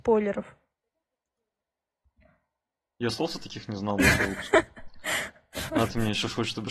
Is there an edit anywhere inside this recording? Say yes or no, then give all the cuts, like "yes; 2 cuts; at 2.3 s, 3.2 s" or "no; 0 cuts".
no; 0 cuts